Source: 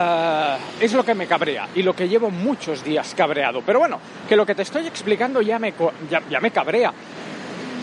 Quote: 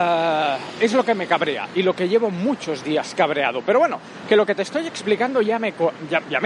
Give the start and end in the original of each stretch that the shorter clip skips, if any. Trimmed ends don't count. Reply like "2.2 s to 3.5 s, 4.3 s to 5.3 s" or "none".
none

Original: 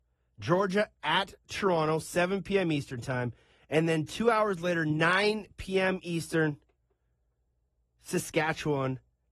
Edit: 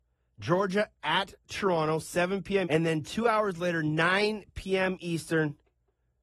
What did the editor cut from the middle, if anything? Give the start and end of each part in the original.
2.6 s to 3.7 s

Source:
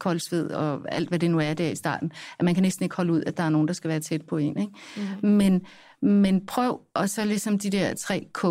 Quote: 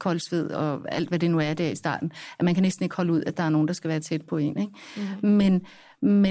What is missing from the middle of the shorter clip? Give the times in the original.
none

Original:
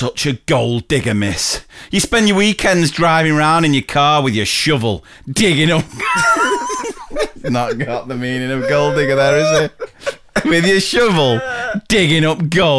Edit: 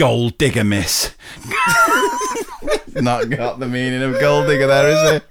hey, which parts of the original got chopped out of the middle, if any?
1.9 s to 5.8 s

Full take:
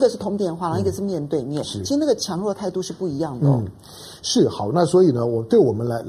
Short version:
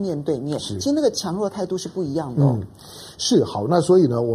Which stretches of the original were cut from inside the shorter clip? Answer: none

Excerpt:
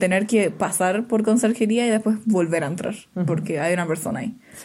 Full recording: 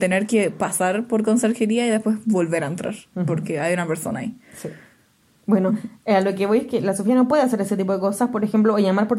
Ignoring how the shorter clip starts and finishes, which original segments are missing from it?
none

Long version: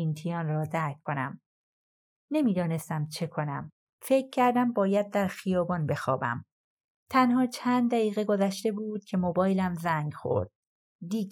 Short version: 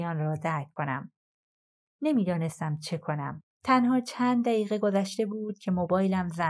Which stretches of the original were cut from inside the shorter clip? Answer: 3.8 s to 6.9 s

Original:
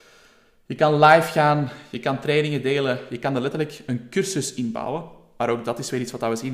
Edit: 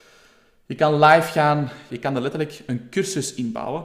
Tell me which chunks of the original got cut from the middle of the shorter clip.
1.9 s to 3.1 s

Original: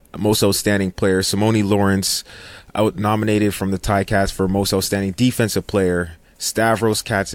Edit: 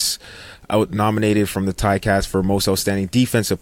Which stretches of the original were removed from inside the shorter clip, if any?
none

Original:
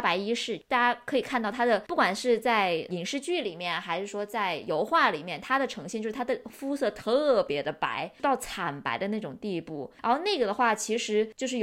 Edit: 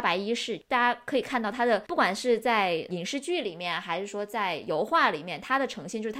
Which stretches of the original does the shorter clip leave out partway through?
none

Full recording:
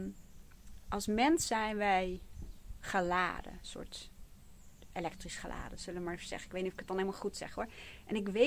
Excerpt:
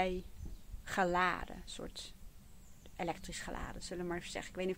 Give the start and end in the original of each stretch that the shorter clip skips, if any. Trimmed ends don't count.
none

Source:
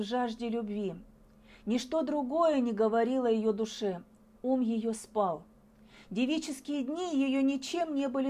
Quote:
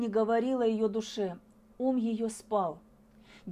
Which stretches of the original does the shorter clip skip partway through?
none

